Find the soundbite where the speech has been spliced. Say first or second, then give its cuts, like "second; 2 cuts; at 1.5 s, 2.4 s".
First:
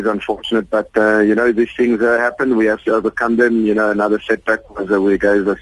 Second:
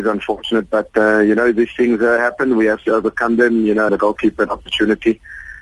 second; 1 cut; at 3.9 s